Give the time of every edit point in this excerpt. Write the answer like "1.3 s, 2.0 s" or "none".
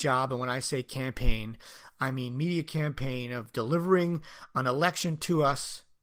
none